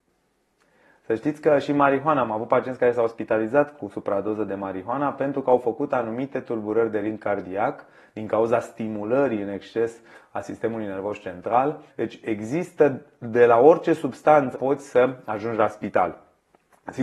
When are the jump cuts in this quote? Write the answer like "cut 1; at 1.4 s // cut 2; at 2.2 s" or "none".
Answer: cut 1; at 11.9 s // cut 2; at 14.5 s